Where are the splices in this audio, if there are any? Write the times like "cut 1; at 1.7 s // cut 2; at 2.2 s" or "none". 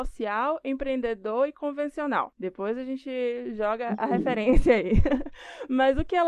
none